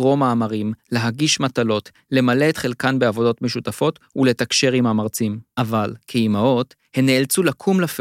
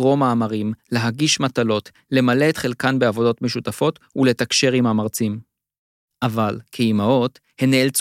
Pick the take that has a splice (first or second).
first